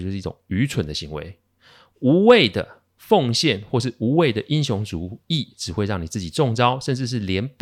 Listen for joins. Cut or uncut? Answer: uncut